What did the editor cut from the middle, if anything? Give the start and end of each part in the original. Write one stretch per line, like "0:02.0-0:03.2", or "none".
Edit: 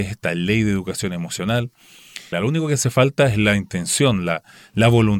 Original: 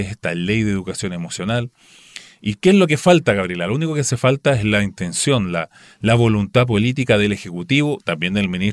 0:02.3-0:03.6